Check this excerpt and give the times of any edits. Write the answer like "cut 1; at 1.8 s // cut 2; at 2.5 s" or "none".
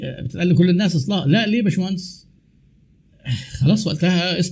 none